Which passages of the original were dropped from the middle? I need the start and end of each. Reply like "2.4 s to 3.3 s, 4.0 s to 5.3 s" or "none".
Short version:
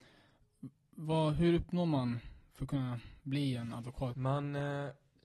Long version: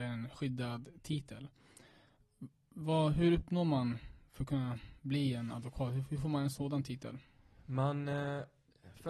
5.9 s to 7.6 s